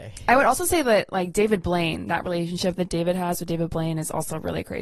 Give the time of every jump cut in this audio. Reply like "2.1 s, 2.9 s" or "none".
none